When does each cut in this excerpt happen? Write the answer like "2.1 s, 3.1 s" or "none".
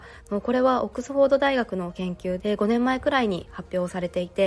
2.4 s